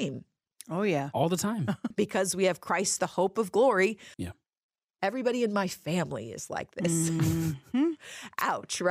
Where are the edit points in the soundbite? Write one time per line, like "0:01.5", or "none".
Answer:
0:01.9
0:04.1